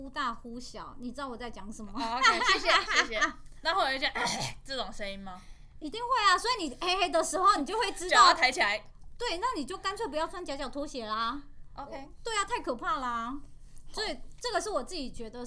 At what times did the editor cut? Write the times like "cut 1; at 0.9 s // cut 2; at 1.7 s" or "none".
none